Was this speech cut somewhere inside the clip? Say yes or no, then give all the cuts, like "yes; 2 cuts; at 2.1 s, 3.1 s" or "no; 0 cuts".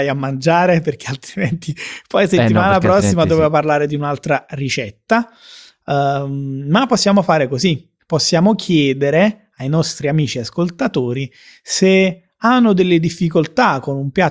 no; 0 cuts